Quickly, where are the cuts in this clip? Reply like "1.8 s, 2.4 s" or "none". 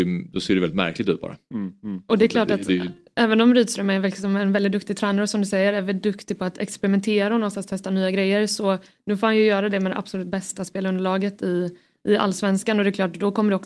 none